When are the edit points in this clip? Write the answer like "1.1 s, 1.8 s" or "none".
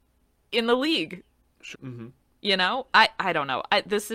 1.7 s